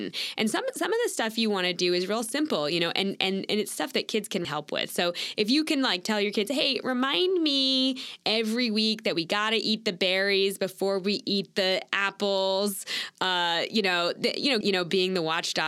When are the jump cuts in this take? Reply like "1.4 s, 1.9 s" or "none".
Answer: 4.4 s, 14.6 s